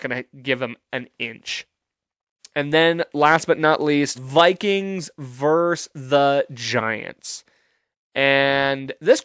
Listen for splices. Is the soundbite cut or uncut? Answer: cut